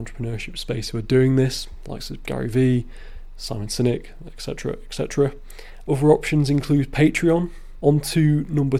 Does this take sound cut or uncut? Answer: cut